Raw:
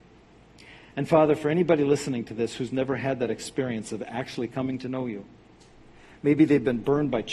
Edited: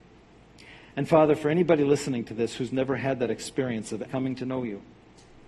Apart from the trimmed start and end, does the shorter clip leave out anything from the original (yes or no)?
yes